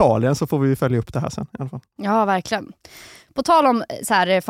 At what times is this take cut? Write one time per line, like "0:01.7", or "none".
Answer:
none